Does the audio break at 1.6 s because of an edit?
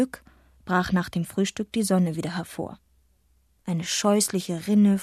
no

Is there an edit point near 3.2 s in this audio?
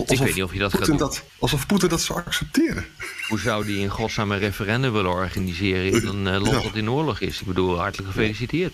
no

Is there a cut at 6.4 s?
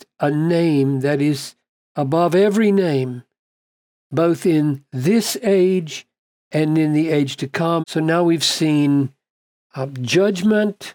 no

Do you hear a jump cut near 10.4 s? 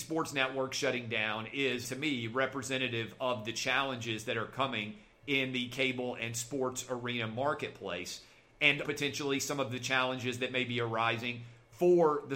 no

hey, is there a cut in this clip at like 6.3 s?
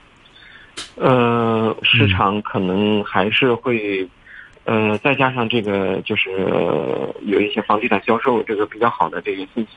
no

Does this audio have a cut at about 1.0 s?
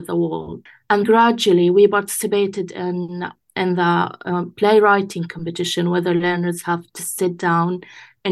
yes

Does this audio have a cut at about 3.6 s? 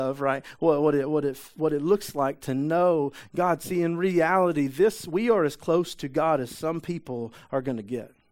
no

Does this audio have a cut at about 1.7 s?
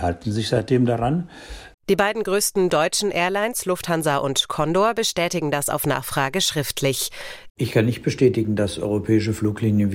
yes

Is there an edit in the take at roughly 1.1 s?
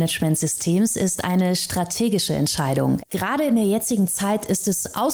no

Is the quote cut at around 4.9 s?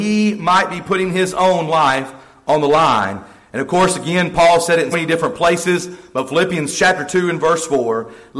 yes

